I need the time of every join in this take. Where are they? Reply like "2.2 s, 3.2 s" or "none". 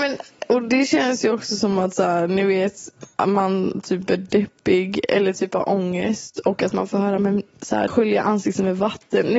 3.1 s, 7.9 s